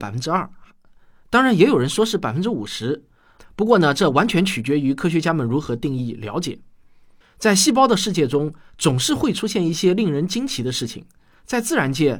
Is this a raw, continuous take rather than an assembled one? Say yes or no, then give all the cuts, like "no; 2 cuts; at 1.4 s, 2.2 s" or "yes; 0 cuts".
yes; 0 cuts